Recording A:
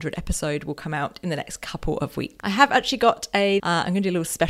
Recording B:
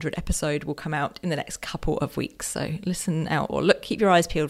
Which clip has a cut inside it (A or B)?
A